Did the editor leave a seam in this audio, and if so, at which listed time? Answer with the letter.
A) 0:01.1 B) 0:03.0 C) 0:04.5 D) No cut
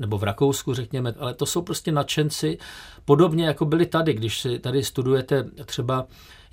A